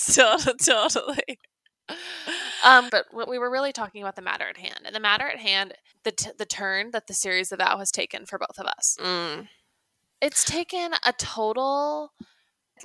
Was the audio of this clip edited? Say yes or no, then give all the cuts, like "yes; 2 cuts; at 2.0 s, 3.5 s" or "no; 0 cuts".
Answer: yes; 2 cuts; at 2.9 s, 5.9 s